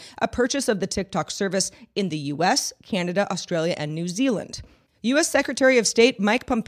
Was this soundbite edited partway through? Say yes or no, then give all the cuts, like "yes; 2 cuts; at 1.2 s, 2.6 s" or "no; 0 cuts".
yes; 1 cut; at 4.9 s